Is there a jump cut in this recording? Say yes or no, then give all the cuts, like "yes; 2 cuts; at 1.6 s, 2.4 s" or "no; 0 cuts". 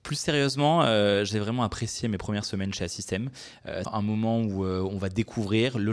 yes; 1 cut; at 3.8 s